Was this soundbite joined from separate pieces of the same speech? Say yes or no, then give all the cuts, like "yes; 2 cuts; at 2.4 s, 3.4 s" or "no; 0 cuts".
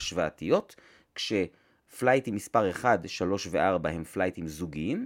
no; 0 cuts